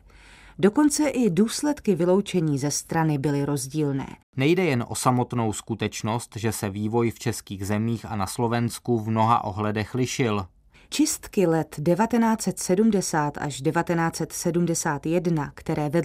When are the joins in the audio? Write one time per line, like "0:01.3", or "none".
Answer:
0:04.2
0:10.7